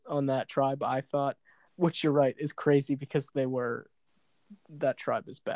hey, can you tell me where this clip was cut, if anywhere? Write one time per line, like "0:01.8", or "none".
0:01.7